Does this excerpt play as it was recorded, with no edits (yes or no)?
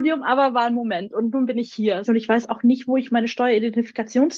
no